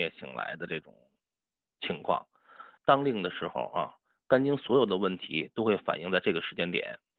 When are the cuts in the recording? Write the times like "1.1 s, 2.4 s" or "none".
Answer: 2.8 s